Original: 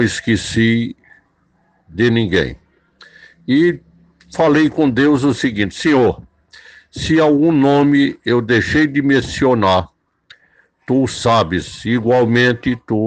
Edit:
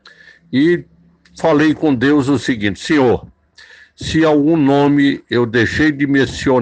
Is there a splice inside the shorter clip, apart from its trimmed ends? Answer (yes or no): no